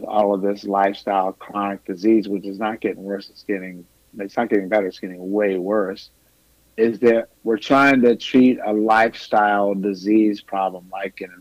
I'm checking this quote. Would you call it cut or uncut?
uncut